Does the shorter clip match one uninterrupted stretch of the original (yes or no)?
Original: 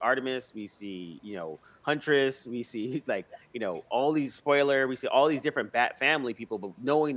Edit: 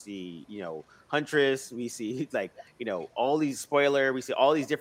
yes